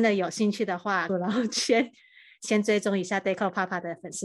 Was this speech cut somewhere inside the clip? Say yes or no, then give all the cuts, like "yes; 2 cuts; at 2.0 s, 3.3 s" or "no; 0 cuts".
yes; 1 cut; at 1.1 s